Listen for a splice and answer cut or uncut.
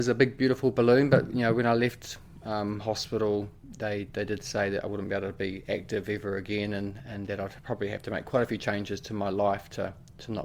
uncut